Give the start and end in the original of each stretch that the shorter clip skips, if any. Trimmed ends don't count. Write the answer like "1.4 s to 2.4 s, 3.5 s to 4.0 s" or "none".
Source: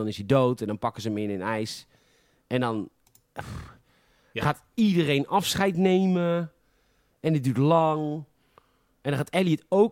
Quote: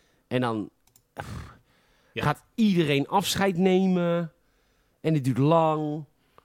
none